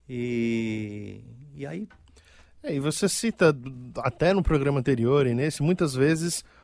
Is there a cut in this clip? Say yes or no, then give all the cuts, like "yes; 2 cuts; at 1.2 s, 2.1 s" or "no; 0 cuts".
no; 0 cuts